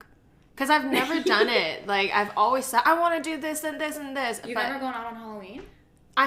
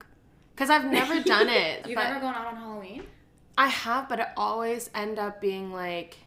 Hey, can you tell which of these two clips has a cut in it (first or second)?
second